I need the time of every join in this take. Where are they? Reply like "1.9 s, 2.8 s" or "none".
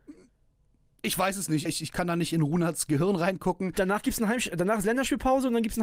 1.7 s